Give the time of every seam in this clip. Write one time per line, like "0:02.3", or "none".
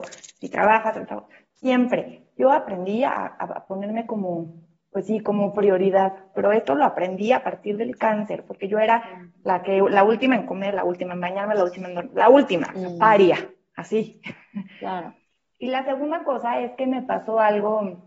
0:06.4
0:10.7
0:12.8